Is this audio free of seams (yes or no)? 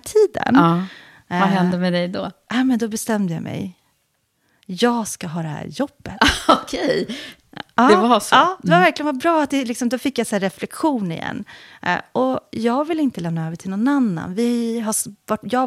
yes